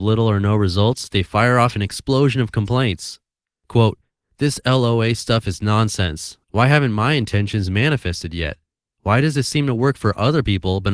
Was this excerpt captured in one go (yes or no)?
no